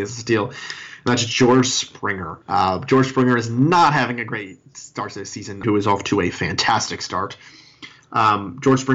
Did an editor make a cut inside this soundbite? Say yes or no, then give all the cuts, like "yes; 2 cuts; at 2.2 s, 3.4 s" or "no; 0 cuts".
yes; 2 cuts; at 2.4 s, 5.6 s